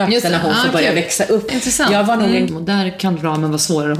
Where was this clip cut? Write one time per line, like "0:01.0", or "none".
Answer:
0:01.5
0:02.5

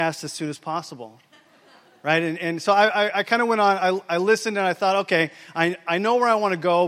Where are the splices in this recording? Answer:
none

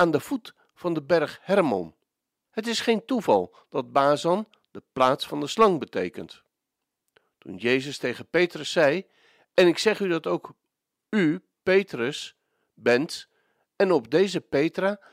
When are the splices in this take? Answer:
0:02.4

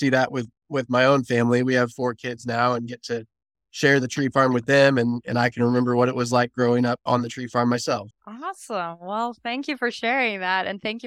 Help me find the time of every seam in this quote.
0:08.1

